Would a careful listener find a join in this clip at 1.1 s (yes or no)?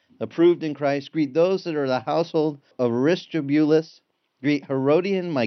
no